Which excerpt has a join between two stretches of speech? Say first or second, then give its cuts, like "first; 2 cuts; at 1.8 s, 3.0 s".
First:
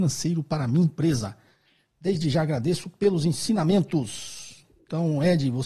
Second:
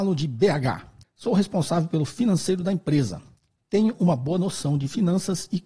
second; 1 cut; at 1.0 s